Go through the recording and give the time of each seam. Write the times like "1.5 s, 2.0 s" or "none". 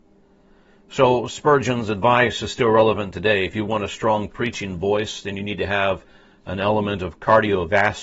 none